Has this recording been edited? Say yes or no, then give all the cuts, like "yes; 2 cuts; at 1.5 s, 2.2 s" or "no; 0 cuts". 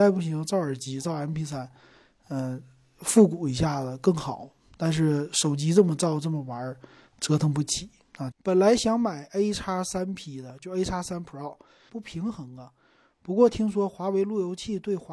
yes; 2 cuts; at 8.3 s, 11.9 s